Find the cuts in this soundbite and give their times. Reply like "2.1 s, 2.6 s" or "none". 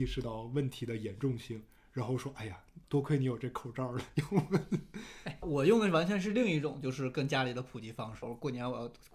5.4 s, 8.2 s